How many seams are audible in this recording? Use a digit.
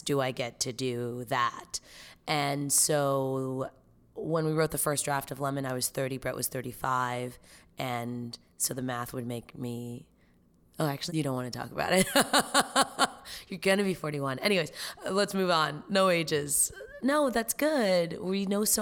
1